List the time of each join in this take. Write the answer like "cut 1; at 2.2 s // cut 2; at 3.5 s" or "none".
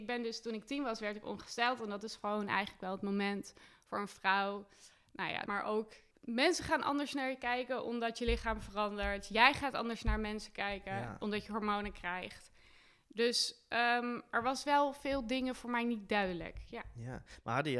cut 1; at 5.5 s